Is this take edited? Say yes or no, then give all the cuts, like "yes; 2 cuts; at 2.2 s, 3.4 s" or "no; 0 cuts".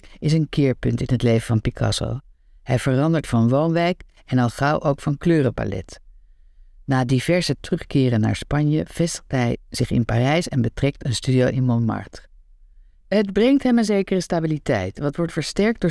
no; 0 cuts